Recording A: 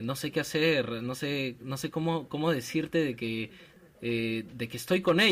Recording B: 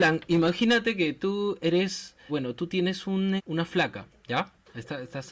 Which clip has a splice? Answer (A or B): B